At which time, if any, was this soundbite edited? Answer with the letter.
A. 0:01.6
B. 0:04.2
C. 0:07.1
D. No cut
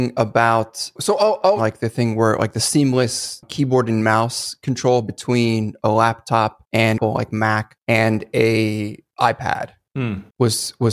A